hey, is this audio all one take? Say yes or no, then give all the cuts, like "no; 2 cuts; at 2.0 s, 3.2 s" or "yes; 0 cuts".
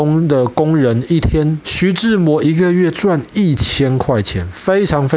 no; 1 cut; at 1.6 s